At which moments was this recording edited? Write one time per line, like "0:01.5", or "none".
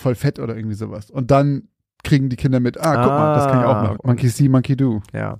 0:04.0